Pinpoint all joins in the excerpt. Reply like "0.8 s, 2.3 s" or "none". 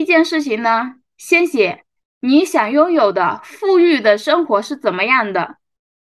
none